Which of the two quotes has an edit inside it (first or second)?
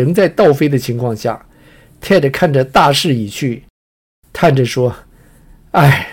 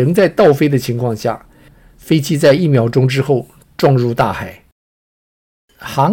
second